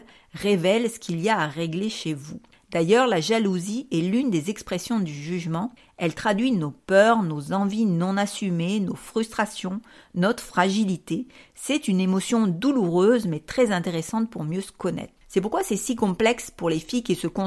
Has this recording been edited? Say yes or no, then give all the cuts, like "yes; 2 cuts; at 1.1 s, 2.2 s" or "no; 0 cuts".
yes; 1 cut; at 15.2 s